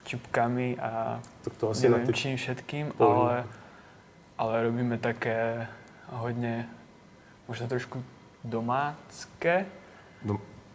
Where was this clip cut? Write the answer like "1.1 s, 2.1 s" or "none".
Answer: none